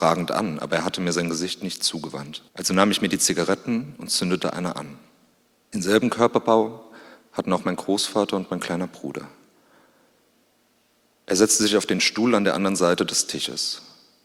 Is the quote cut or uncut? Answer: cut